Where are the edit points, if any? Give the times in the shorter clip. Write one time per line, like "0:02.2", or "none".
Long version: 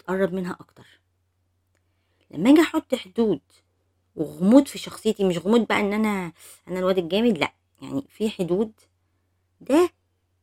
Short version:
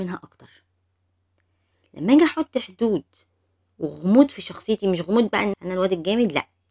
0:05.5